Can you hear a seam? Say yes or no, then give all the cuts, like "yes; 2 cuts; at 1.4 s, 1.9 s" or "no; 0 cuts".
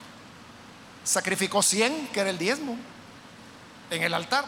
yes; 1 cut; at 1.0 s